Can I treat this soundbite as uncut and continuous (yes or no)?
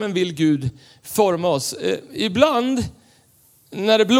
yes